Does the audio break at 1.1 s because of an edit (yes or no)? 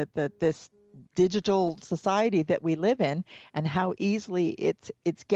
yes